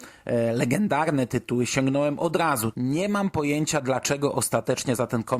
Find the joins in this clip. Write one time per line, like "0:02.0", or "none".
0:02.7